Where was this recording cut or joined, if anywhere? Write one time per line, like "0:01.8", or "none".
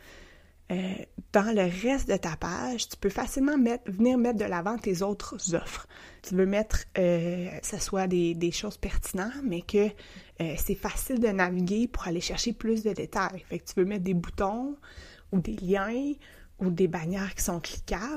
0:06.2
0:07.6

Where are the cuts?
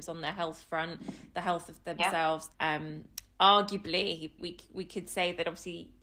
0:02.5
0:04.4

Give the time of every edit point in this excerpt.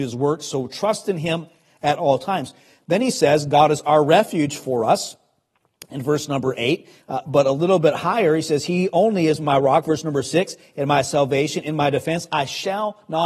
none

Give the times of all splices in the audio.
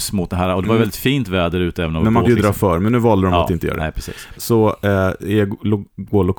0:02.2
0:04.3

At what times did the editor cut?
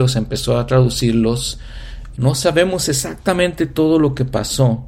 0:02.1

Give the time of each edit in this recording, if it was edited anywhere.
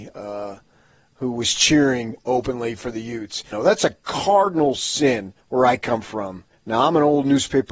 0:03.5
0:05.4
0:06.5

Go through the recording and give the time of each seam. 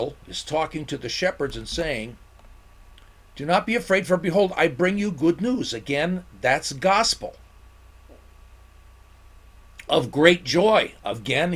none

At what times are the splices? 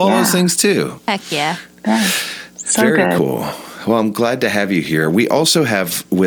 none

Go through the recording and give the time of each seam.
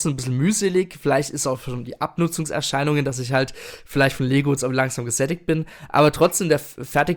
none

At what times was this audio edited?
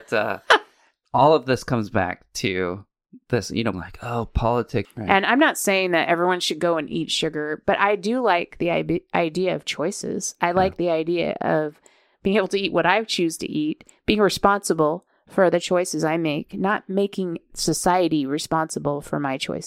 0:03.7
0:04.8

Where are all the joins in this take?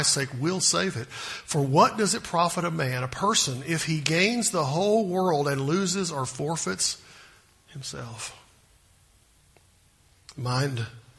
none

